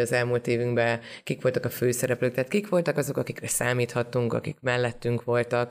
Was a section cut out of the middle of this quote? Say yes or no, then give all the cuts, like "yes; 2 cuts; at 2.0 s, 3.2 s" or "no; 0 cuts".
no; 0 cuts